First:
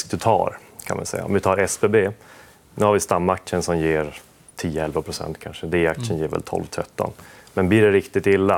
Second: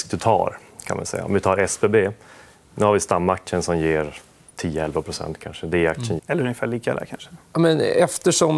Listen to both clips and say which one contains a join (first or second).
second